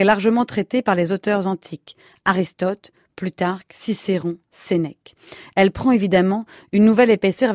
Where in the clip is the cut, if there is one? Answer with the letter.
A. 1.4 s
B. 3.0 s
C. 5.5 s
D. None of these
D